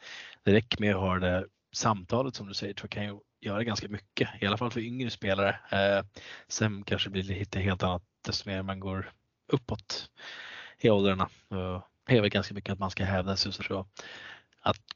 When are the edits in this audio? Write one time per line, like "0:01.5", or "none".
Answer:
0:12.0
0:13.6